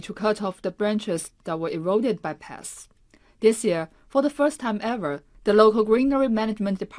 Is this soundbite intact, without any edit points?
yes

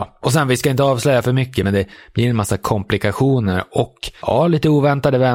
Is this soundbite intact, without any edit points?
yes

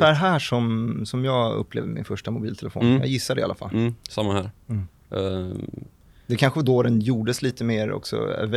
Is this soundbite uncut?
yes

